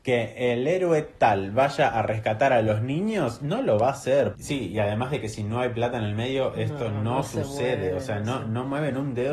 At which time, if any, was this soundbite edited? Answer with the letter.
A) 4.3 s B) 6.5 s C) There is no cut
A